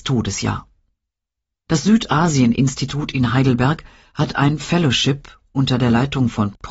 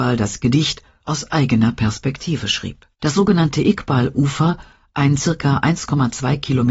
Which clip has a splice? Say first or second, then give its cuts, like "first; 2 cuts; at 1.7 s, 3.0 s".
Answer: second; 2 cuts; at 1.0 s, 2.9 s